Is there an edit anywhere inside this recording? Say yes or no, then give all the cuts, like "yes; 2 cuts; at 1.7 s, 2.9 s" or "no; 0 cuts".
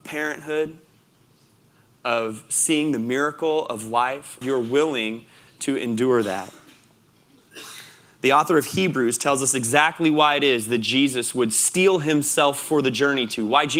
yes; 1 cut; at 4.4 s